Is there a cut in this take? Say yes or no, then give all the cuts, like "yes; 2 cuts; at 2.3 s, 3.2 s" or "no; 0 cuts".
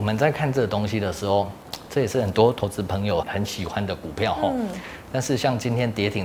yes; 1 cut; at 3.2 s